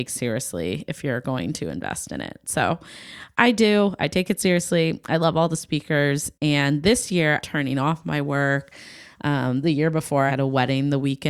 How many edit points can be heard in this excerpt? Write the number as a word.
two